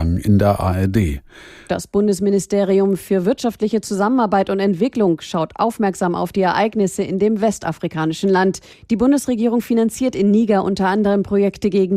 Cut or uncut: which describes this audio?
cut